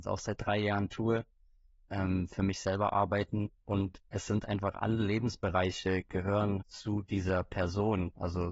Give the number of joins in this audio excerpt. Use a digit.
2